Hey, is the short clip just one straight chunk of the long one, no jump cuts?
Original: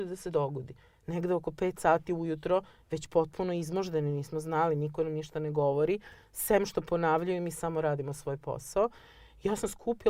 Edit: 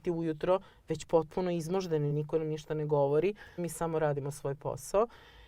no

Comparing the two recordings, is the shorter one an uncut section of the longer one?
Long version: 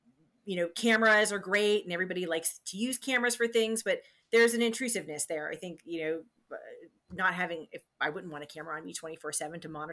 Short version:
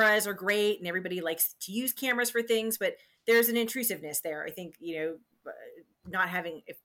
yes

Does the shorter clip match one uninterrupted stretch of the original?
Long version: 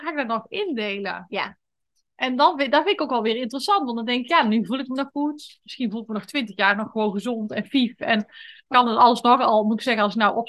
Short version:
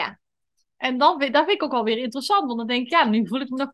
yes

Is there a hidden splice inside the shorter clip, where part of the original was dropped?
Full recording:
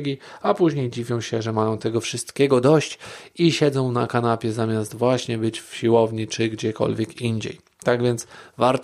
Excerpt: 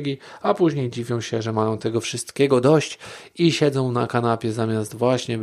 no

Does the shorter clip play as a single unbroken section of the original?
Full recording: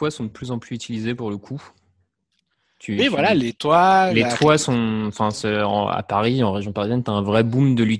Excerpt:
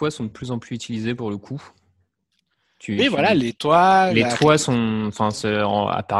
yes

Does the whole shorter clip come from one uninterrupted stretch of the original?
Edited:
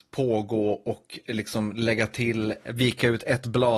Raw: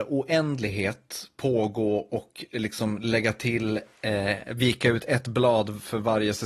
no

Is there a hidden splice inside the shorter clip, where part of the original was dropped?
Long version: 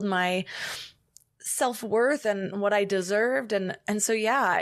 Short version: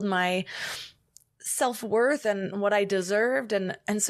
no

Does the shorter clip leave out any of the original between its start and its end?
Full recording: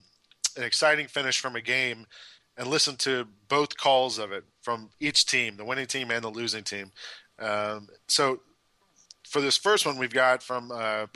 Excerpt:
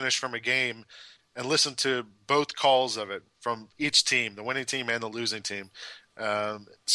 no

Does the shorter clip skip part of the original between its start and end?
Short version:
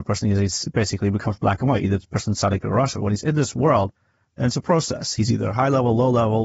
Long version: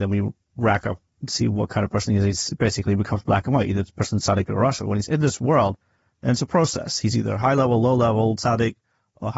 no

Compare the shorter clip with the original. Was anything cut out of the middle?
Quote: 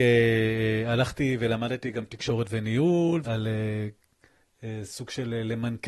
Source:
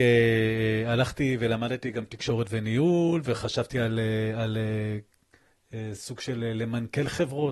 yes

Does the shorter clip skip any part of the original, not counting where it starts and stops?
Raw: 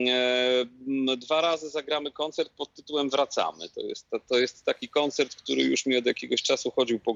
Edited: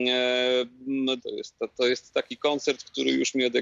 yes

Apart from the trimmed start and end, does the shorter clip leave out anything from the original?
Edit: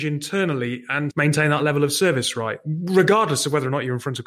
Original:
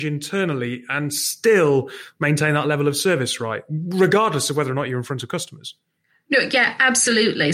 yes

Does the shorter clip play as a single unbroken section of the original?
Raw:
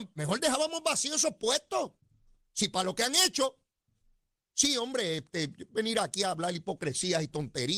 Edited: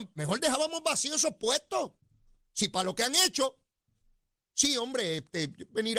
yes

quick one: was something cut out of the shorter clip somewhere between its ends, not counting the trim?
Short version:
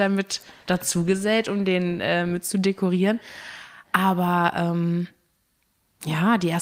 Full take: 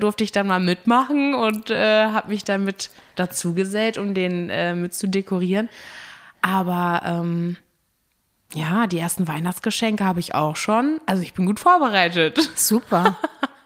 no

